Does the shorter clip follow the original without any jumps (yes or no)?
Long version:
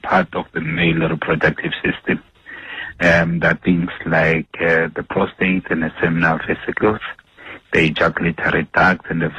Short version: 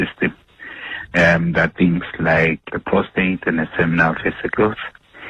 no